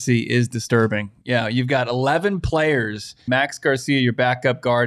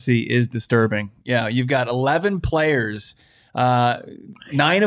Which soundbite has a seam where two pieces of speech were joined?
first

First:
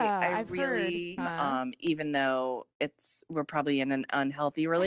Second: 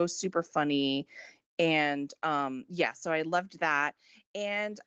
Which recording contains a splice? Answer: first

